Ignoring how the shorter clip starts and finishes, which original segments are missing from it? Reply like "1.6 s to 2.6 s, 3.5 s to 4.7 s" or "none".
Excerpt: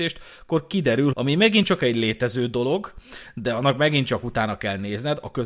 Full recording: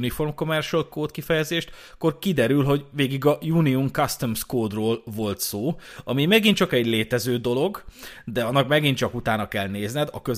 2.6 s to 6.0 s